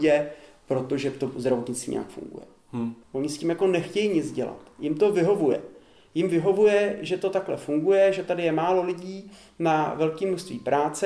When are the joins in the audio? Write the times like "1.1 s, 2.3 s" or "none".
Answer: 3.0 s